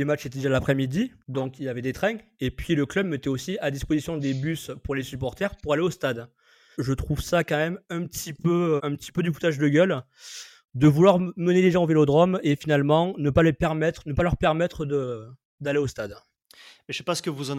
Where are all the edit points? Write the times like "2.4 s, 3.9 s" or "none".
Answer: 1.2 s, 6.7 s, 8.8 s